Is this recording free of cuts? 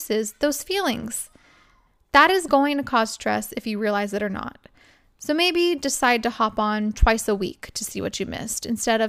yes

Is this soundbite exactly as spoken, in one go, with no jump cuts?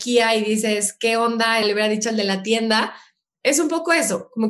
no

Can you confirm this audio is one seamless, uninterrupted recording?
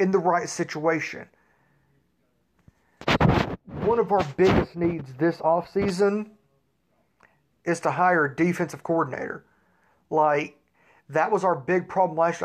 yes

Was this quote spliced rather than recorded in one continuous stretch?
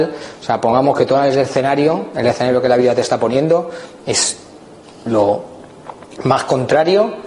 no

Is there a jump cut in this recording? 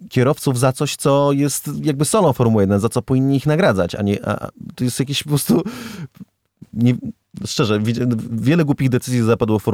no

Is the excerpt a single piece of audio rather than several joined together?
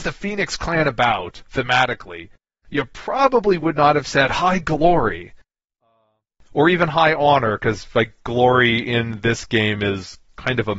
yes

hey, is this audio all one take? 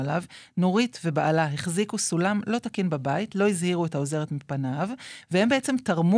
yes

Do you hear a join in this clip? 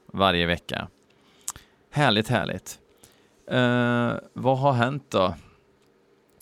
no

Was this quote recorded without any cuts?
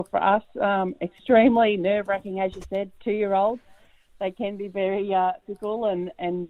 yes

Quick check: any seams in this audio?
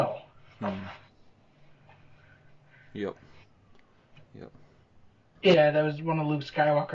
yes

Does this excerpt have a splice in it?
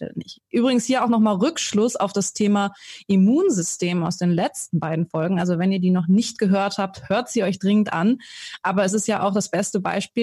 no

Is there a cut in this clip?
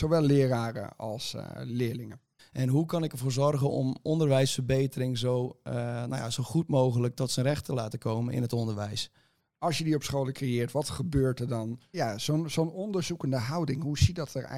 yes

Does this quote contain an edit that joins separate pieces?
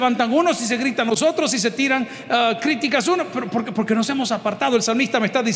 no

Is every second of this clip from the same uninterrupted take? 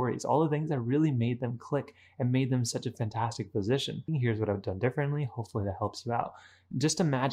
no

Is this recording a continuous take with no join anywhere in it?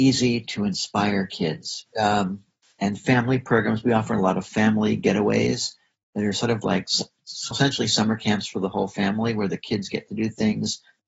no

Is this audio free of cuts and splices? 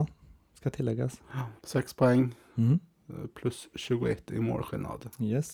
no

